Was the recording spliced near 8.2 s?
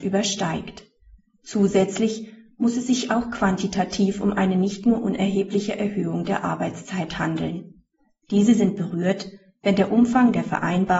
yes; 1 cut; at 8.2 s

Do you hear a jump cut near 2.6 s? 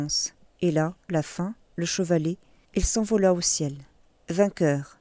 yes; 2 cuts; at 1.1 s, 2.6 s

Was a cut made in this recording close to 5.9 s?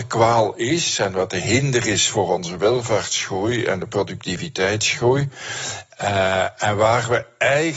no; 0 cuts

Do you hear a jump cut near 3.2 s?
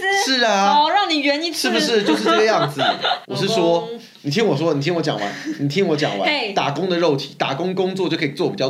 yes; 1 cut; at 3.2 s

